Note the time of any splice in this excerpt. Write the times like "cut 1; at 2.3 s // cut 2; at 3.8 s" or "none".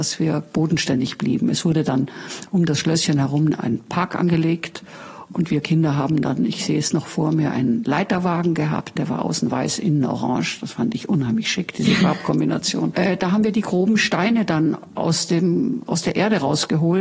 cut 1; at 12.9 s